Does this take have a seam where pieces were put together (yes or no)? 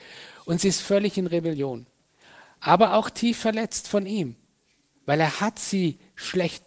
no